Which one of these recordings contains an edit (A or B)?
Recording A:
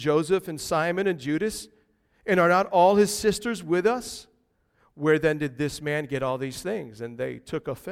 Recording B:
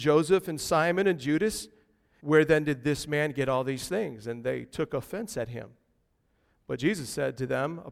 B